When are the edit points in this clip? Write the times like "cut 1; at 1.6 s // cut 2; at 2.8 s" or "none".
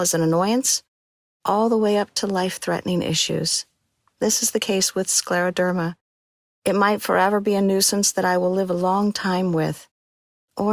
none